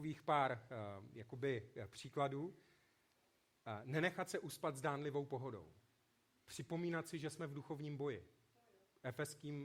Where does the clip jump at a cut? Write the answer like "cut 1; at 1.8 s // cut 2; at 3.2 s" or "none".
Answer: cut 1; at 6.4 s